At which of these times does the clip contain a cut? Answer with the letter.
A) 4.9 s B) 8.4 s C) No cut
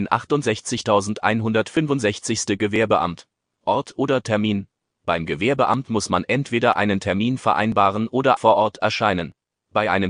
B